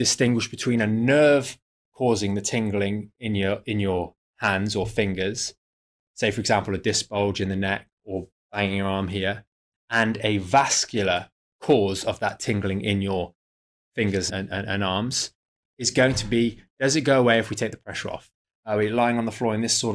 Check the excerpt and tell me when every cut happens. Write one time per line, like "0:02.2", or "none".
0:14.3
0:18.5